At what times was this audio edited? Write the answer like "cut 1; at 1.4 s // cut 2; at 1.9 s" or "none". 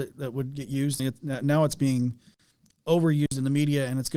cut 1; at 1.0 s